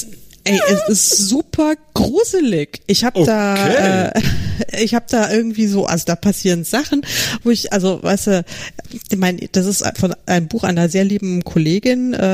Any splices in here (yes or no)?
no